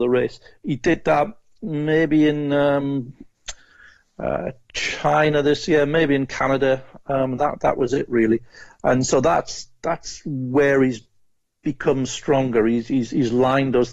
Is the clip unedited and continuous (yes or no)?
yes